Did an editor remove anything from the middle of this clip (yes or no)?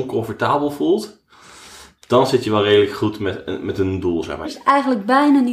yes